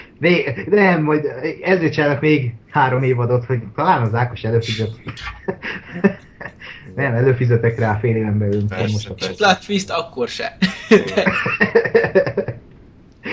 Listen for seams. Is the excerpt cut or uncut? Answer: uncut